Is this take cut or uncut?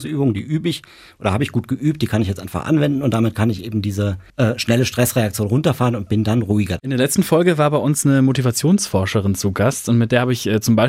cut